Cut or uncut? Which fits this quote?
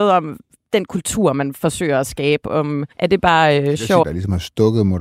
cut